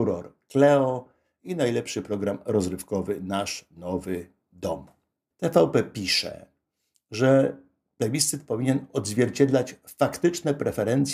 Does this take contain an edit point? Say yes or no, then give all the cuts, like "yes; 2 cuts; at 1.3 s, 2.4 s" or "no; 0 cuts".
yes; 1 cut; at 5.3 s